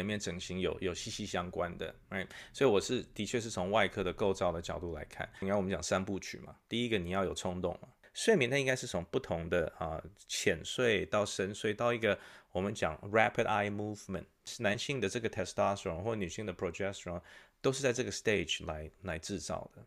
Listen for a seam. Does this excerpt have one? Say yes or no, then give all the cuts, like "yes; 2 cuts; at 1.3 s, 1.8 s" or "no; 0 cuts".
yes; 1 cut; at 5.4 s